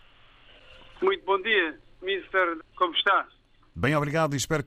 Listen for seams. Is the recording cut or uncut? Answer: cut